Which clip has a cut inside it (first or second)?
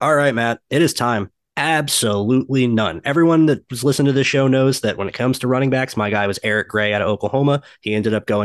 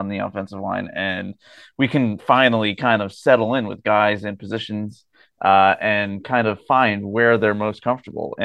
first